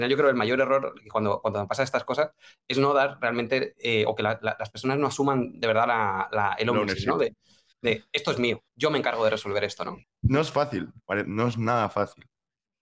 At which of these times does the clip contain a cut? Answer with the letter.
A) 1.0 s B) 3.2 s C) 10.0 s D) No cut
C